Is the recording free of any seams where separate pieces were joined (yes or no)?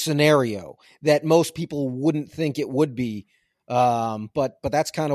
yes